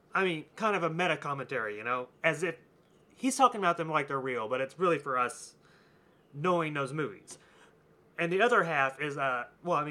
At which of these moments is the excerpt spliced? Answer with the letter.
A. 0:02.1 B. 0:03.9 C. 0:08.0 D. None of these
A